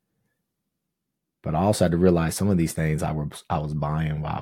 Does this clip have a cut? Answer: no; 0 cuts

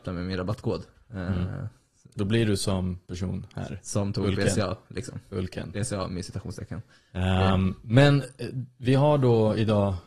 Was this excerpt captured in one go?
yes; 0 cuts

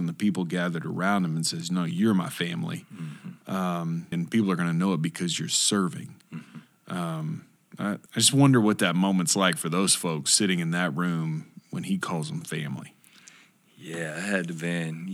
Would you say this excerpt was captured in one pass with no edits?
no; 2 cuts; at 4.1 s, 8.1 s

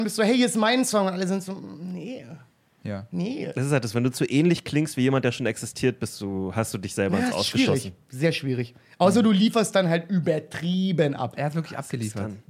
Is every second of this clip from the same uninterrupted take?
yes; 0 cuts

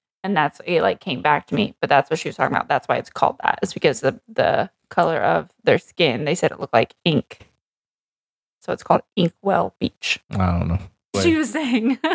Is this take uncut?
no; 1 cut; at 10.2 s

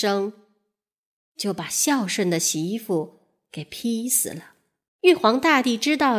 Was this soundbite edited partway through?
yes; 1 cut; at 4.9 s

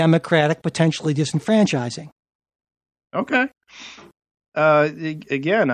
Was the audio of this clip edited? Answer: no; 0 cuts

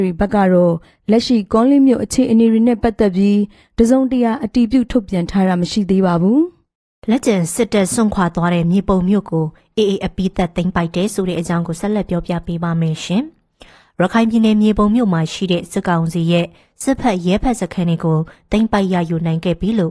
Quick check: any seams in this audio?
no; 0 cuts

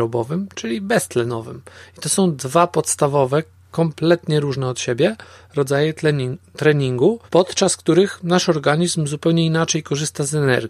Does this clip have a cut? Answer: yes; 1 cut; at 7.3 s

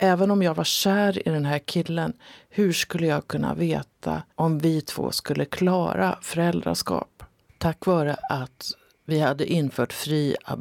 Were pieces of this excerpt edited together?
yes; 1 cut; at 4.3 s

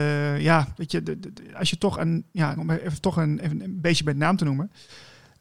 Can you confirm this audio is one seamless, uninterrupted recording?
no; 1 cut; at 2.6 s

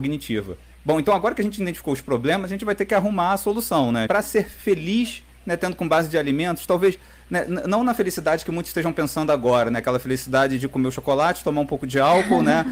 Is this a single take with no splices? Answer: no; 1 cut; at 4.1 s

